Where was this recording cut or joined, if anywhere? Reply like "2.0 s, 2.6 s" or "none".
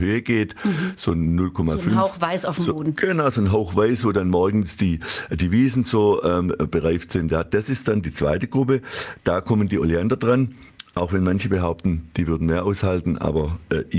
none